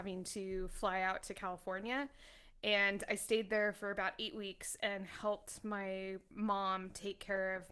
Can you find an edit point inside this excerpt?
no; 0 cuts

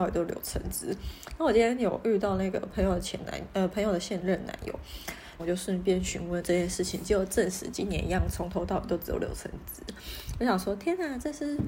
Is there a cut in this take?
yes; 1 cut; at 5.4 s

